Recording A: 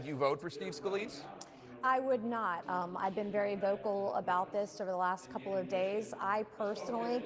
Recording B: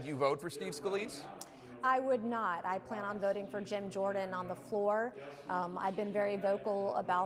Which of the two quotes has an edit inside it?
A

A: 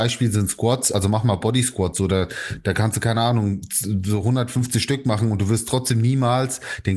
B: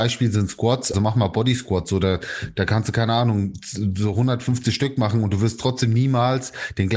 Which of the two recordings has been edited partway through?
B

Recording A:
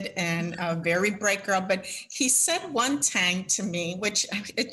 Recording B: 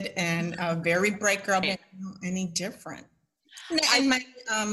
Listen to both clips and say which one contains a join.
B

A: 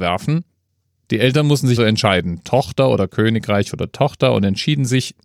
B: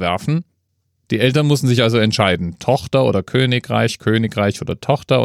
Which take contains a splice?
A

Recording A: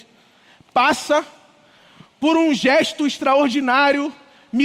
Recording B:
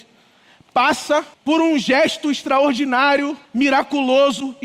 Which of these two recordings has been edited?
B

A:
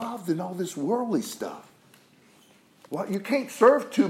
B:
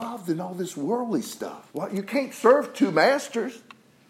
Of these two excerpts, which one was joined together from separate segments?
B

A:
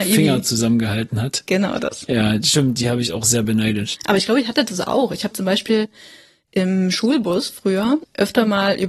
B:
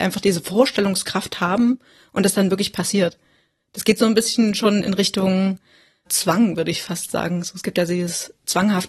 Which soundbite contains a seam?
A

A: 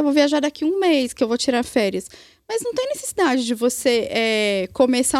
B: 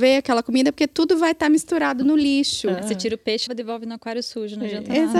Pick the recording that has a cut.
B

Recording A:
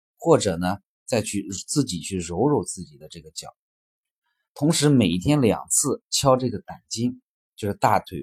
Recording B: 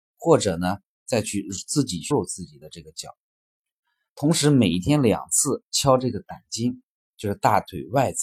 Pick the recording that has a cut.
B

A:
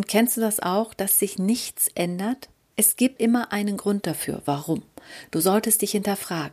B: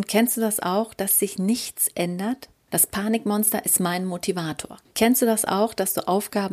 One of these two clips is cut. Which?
B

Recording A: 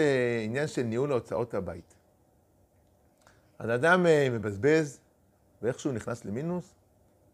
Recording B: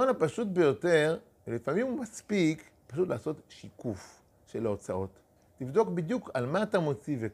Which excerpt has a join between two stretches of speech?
B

